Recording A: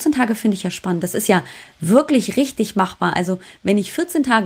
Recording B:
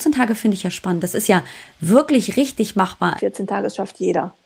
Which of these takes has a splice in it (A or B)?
B